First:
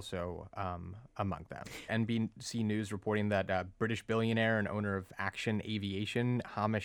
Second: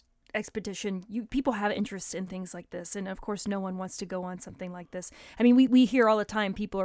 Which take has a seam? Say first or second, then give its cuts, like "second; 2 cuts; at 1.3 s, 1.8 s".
first; 1 cut; at 1.9 s